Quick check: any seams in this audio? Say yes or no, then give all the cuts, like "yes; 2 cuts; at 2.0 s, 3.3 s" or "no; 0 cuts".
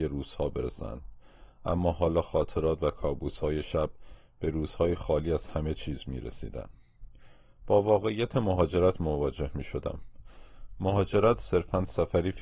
no; 0 cuts